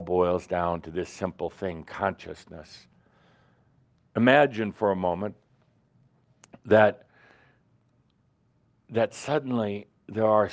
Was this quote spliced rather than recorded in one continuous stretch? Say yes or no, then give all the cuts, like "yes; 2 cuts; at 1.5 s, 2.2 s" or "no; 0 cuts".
no; 0 cuts